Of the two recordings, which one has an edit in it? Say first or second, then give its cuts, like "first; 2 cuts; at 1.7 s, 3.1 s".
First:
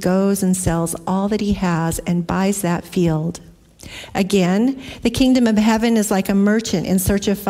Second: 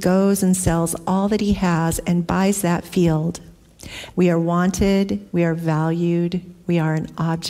second; 1 cut; at 4.1 s